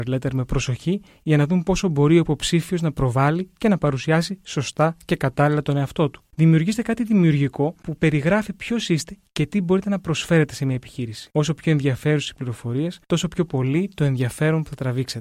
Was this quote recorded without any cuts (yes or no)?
yes